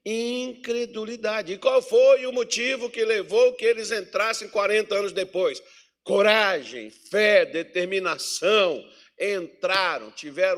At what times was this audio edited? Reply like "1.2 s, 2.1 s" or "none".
none